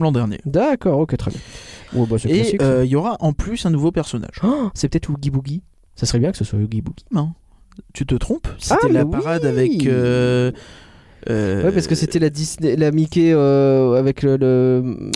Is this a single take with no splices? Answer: no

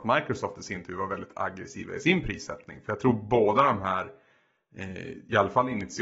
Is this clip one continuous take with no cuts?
yes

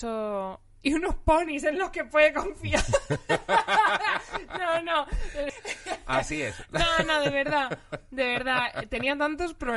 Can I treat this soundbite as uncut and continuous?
no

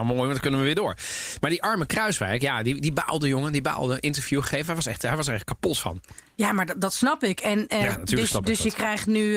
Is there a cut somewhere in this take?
no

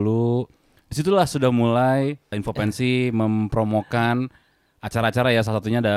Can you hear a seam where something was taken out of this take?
yes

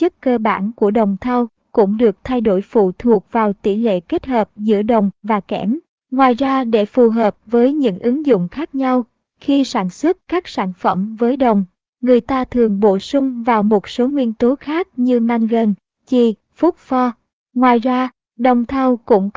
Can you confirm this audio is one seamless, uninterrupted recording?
yes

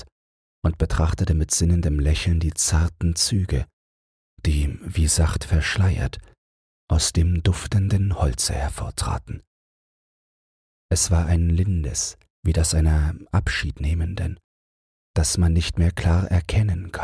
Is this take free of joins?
no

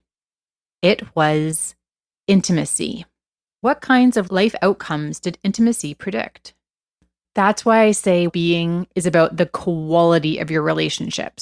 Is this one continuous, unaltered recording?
no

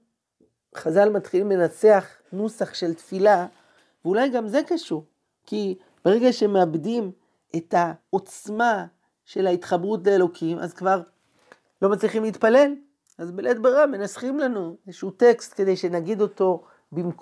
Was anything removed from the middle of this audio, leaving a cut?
no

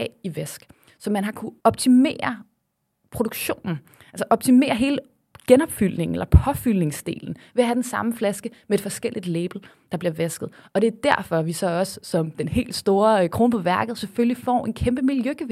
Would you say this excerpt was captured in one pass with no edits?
no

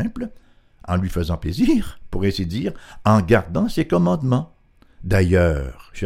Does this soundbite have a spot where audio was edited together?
no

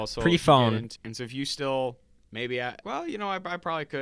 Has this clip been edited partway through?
yes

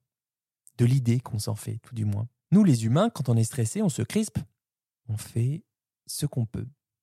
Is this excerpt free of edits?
no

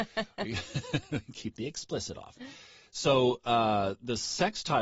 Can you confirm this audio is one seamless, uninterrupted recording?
yes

